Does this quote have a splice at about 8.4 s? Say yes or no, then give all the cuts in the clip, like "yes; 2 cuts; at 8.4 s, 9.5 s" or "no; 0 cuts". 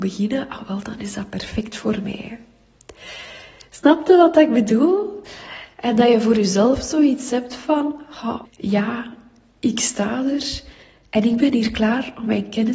yes; 2 cuts; at 5.7 s, 8.4 s